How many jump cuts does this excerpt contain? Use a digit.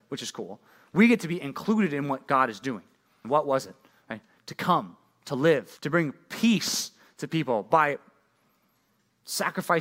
2